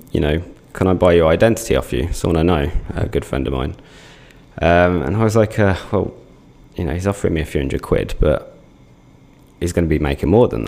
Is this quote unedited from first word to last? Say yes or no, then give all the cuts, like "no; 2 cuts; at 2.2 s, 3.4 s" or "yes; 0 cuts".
yes; 0 cuts